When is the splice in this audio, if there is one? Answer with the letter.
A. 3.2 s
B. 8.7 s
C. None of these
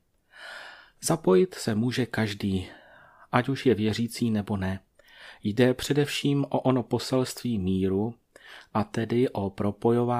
C